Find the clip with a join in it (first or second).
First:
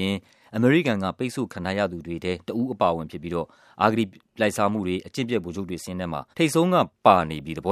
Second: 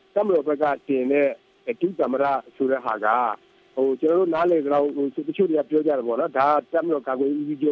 first